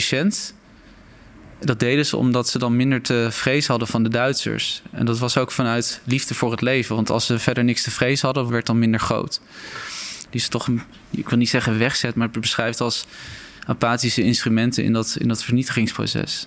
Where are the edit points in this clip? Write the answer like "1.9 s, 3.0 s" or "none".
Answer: 8.5 s, 10.3 s